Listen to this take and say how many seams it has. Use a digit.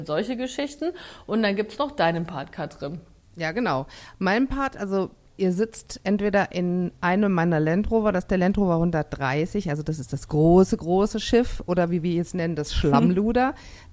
1